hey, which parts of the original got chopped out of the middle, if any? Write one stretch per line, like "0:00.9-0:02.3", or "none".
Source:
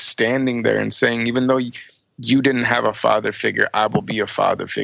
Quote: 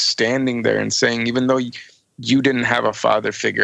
none